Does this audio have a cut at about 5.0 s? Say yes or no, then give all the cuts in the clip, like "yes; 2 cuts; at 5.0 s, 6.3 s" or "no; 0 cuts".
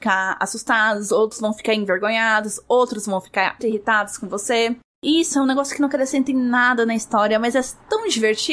no; 1 cut; at 3.6 s